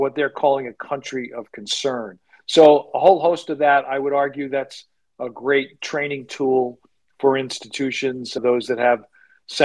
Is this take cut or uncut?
uncut